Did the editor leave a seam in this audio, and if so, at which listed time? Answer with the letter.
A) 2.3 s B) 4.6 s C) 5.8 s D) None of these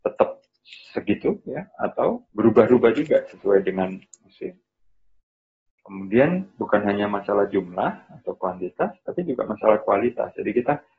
A